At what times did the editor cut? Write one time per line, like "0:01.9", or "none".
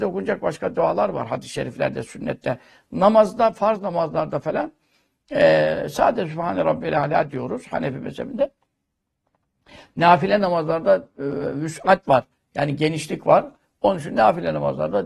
none

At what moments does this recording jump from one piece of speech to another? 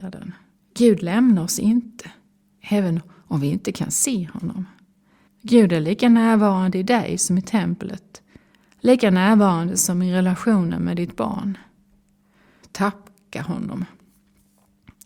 0:05.3
0:12.6

